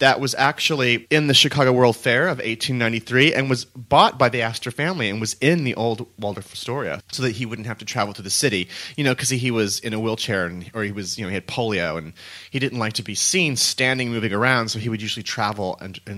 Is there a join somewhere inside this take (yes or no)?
yes